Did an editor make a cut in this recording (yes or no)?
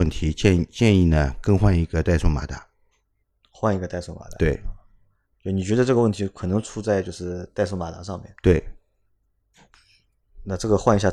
no